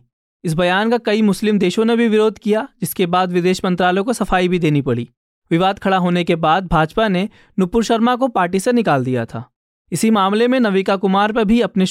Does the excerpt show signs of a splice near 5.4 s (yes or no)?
no